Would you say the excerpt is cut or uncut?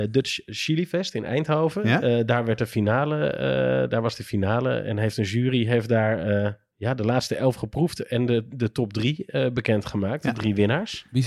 uncut